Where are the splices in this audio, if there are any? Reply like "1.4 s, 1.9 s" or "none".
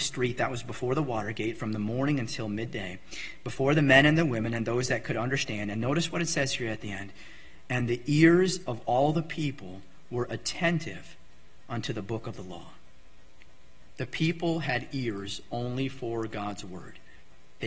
13.9 s